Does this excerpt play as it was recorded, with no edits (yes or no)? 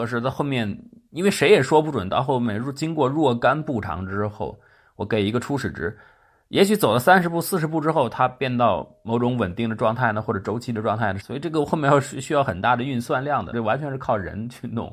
no